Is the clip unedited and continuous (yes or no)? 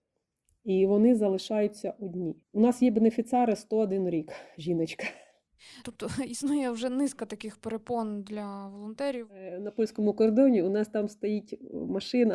no